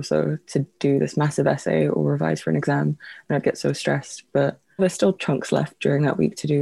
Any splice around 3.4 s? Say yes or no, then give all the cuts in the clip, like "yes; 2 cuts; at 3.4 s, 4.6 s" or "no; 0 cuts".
no; 1 cut; at 4.8 s